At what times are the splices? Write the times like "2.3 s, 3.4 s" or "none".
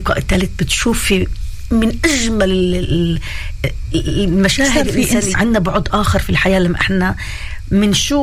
5.3 s